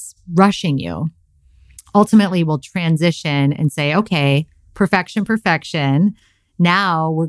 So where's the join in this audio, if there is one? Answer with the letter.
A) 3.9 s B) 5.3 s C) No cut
B